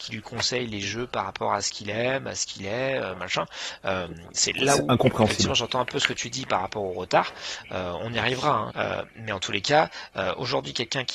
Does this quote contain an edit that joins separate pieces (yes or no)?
yes